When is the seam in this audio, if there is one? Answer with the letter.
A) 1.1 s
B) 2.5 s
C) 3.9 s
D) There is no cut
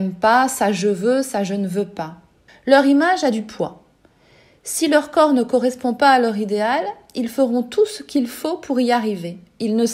B